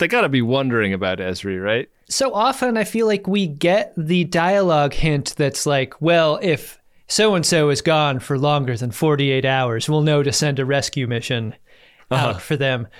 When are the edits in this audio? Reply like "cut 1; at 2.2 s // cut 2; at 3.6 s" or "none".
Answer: none